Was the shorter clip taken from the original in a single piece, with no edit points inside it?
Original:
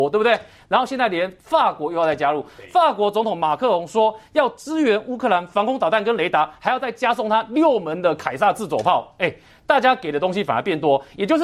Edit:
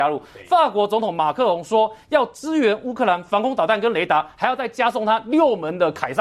yes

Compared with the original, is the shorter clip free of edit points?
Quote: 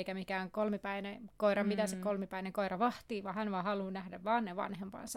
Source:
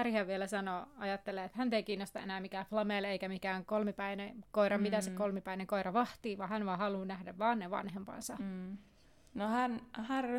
yes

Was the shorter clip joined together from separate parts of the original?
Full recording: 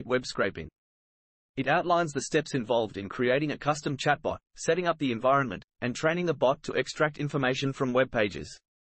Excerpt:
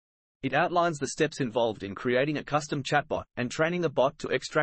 yes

